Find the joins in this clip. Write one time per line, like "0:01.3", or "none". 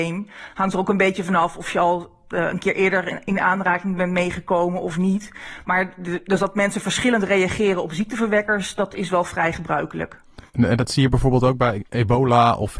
0:10.5
0:11.9